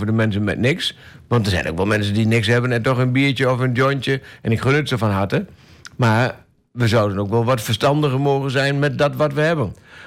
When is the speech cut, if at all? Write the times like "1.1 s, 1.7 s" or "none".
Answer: none